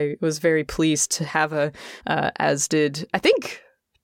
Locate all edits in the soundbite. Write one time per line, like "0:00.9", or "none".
0:02.0